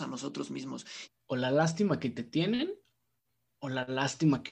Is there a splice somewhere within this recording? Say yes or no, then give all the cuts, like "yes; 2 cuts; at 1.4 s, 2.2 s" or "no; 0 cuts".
yes; 1 cut; at 1.1 s